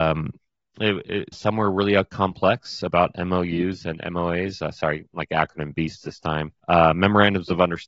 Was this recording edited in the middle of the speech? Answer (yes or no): yes